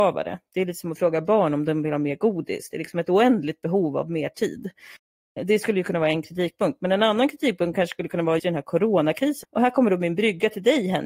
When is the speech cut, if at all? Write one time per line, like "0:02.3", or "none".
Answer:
0:08.4
0:09.4

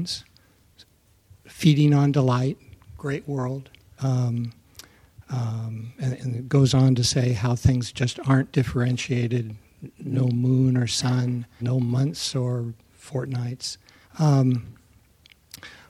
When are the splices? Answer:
0:04.0
0:11.6
0:14.0

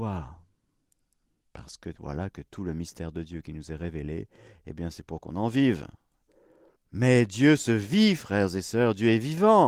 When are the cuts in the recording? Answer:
0:06.8

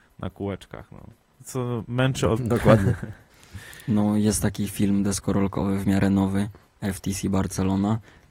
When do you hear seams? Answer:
0:02.4

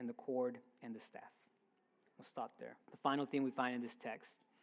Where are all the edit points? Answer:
0:02.8

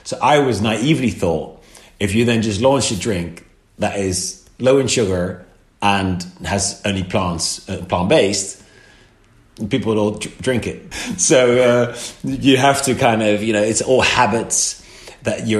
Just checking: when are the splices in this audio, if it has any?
0:10.9

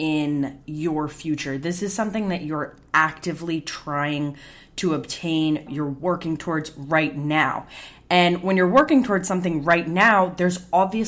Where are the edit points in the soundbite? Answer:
0:05.7

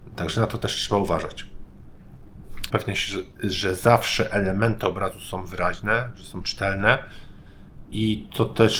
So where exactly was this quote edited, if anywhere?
0:02.7

